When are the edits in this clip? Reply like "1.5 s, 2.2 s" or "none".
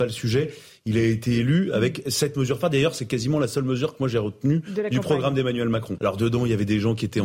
6.0 s